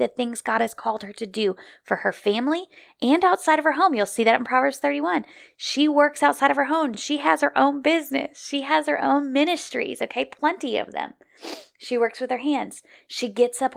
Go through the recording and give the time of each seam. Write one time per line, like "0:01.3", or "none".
none